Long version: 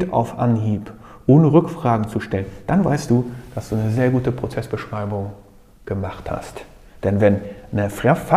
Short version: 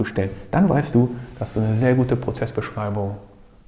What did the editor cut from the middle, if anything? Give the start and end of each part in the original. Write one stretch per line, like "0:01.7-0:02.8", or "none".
none

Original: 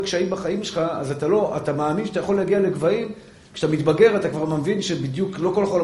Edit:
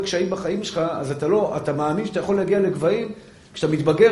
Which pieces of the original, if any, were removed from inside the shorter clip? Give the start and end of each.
none

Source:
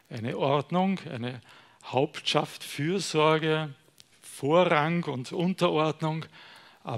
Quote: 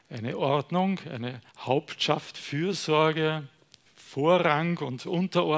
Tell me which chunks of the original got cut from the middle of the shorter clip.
0:01.5-0:01.7

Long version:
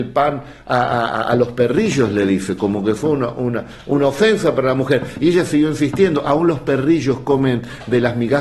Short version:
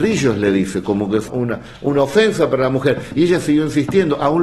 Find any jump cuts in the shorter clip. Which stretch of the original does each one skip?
0:03.0-0:03.3

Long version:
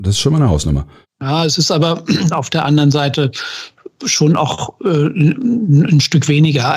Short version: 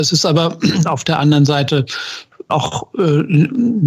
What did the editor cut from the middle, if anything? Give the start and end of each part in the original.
0:04.0-0:04.4

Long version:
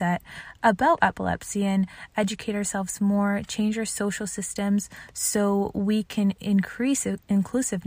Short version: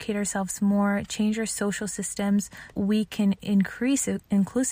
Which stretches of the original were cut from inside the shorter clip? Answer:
0:05.1-0:05.7

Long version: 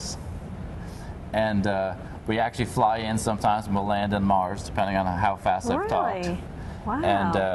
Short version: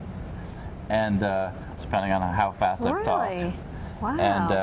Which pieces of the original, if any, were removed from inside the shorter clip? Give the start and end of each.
0:02.2-0:04.6

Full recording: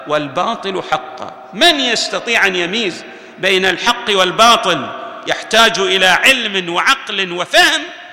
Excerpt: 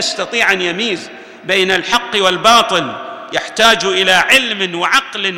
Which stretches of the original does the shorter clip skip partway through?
none

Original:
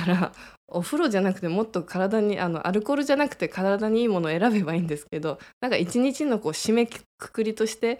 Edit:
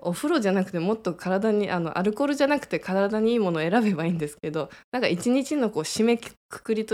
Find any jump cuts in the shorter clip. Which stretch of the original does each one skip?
none

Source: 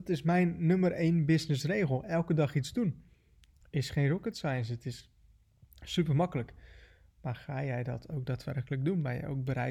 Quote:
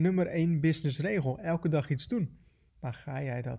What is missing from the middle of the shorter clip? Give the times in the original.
0:03.3-0:07.1

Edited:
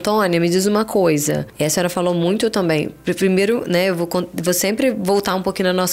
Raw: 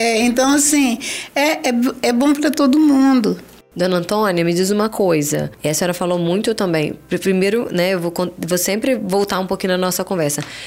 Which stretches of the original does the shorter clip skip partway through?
none

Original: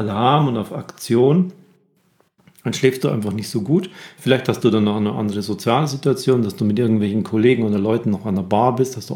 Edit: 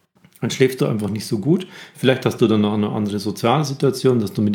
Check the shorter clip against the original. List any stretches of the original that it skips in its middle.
none

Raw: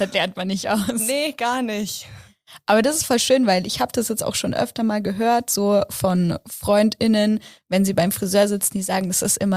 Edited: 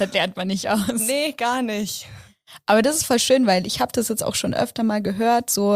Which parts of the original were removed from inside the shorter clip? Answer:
none

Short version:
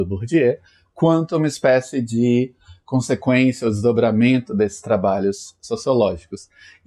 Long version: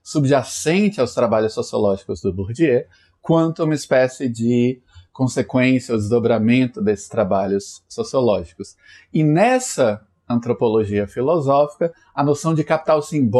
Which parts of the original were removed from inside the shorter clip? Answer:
none

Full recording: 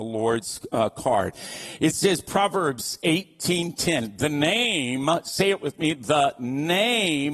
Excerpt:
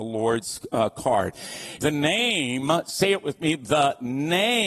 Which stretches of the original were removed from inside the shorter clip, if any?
0:01.8-0:04.2

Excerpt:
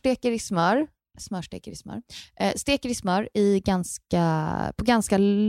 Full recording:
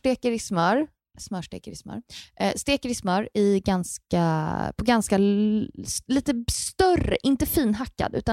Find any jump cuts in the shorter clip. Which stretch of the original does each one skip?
none

